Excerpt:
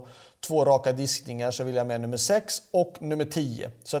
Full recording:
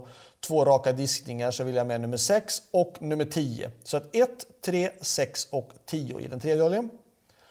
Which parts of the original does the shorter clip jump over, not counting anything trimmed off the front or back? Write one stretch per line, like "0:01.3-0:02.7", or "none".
none